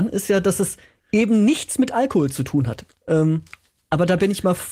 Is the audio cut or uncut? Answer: cut